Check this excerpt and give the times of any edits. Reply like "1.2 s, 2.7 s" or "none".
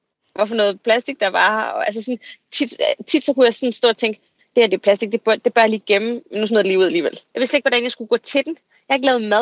7.3 s